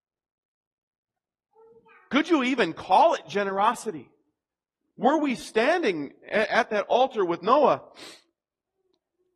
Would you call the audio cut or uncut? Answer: cut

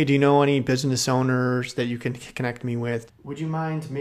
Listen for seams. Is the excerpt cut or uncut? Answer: cut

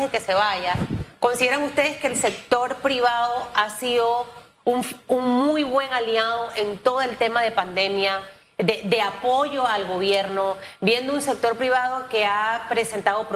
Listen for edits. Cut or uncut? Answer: uncut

